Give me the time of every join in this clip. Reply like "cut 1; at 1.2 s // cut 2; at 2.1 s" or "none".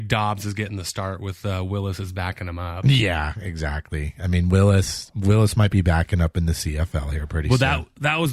none